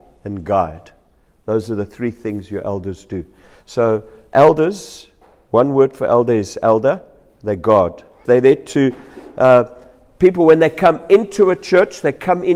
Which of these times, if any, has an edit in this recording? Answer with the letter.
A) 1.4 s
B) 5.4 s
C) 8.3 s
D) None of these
C